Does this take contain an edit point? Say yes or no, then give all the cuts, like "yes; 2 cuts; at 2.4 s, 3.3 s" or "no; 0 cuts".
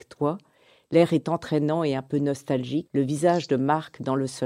yes; 1 cut; at 2.9 s